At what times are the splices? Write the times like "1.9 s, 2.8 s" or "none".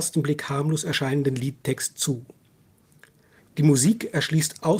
3.4 s